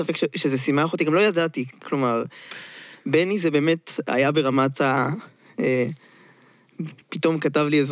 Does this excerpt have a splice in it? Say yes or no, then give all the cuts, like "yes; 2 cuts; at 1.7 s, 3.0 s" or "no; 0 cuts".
no; 0 cuts